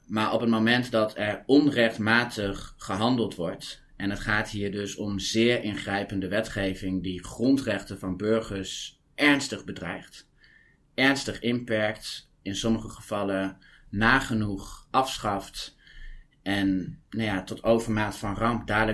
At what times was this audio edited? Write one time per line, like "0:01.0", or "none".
none